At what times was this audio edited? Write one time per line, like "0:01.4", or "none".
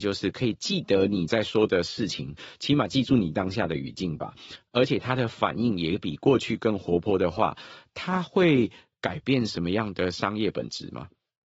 none